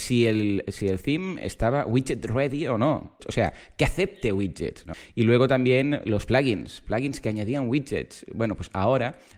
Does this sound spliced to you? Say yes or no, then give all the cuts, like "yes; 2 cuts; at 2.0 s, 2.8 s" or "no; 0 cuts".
yes; 1 cut; at 3.2 s